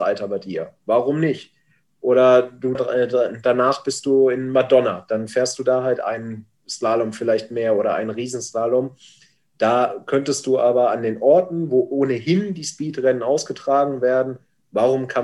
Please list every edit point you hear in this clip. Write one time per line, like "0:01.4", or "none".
0:02.7